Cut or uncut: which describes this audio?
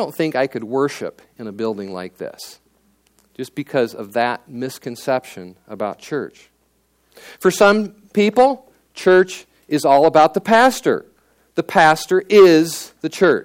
uncut